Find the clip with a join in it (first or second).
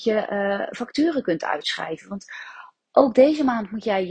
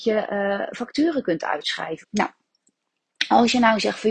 second